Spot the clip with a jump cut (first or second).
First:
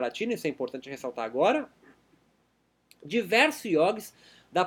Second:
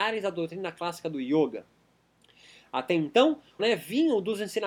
second